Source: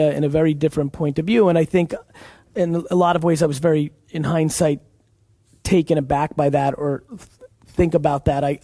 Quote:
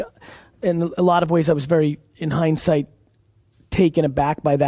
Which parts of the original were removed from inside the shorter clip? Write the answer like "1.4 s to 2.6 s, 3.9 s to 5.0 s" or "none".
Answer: none